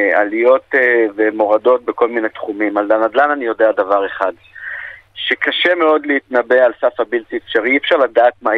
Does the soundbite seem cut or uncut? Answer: uncut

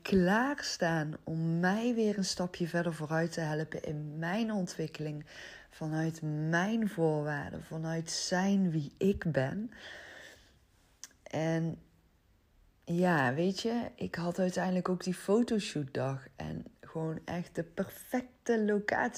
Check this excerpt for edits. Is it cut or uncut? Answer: uncut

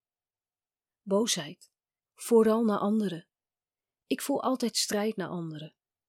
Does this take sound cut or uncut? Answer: cut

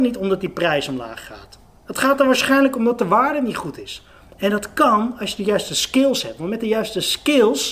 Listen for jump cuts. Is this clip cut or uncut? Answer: cut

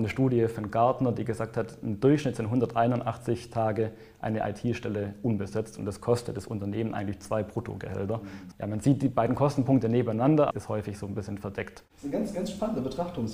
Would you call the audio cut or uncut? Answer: cut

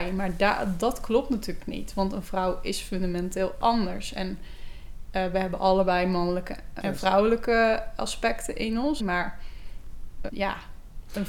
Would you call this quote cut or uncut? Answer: cut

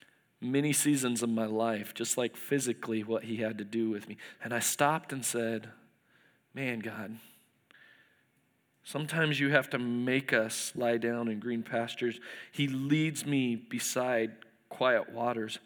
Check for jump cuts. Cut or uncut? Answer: cut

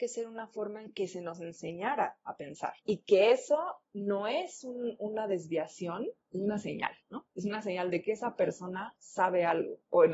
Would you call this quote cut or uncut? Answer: cut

